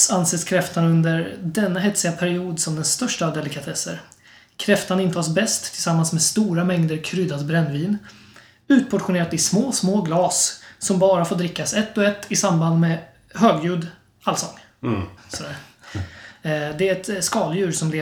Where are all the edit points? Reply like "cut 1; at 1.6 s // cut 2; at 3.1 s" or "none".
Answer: cut 1; at 15.2 s